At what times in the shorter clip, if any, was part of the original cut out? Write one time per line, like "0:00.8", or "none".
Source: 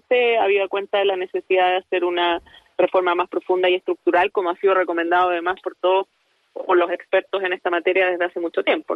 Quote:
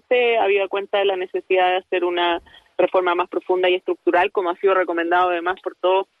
none